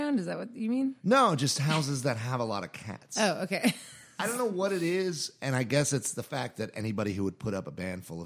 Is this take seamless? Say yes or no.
yes